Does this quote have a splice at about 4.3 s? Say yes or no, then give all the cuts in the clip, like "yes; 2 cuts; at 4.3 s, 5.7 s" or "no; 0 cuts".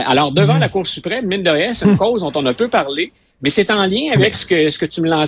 no; 0 cuts